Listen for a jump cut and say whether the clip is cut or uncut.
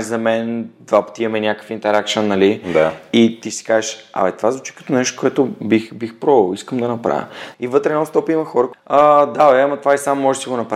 cut